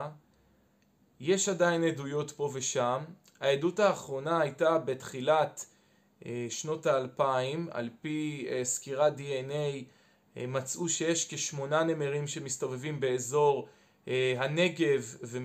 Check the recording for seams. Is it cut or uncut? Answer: uncut